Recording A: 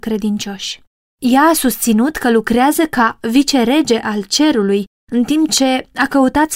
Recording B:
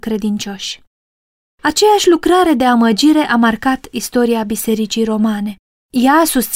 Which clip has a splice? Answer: A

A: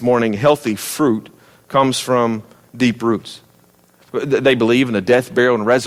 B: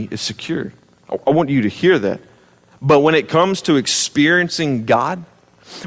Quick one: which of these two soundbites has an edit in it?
A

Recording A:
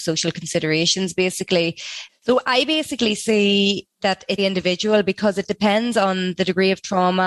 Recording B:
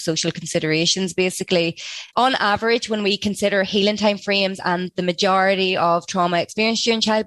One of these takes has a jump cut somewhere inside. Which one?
A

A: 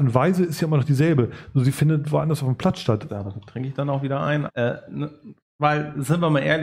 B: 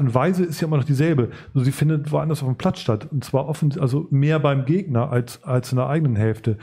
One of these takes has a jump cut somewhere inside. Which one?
A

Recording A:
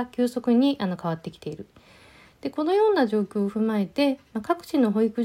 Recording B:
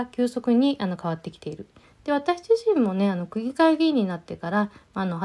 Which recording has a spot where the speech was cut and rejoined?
B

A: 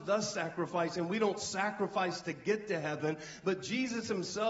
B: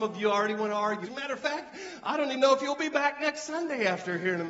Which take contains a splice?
B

